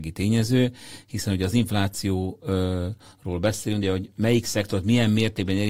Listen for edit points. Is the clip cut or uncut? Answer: cut